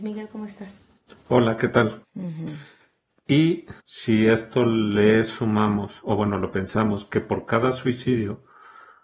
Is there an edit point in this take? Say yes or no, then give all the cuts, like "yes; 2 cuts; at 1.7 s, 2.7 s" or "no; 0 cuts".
yes; 2 cuts; at 2.0 s, 3.8 s